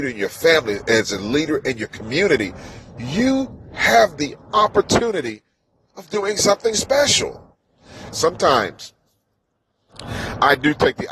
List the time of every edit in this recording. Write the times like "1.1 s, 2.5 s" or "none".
8.1 s

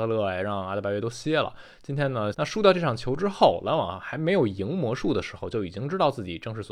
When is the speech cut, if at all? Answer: 2.3 s

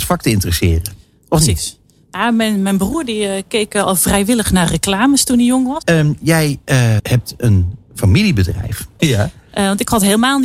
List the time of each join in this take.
5.8 s, 7.0 s, 9.0 s

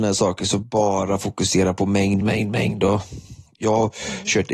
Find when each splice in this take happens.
2.2 s

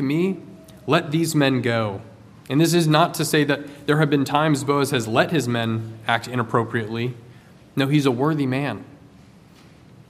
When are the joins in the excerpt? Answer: 2.4 s

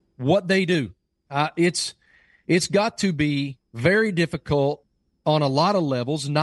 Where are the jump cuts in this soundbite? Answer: 1.3 s, 3.6 s

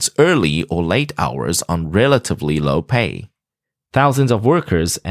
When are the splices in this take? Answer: 3.9 s

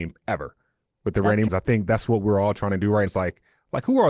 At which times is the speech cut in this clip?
1.5 s, 3.1 s

